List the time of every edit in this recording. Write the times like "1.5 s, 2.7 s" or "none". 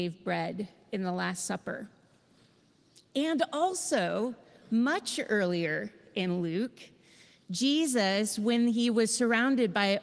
none